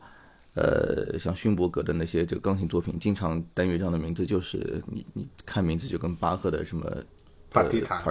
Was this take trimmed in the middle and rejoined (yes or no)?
yes